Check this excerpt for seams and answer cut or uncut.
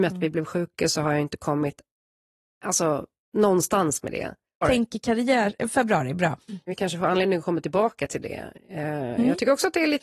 cut